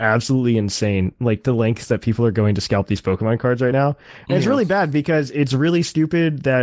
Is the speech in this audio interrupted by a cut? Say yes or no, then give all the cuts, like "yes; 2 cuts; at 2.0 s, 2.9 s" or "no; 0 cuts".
no; 0 cuts